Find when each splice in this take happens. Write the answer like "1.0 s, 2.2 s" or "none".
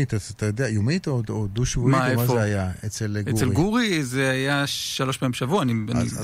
none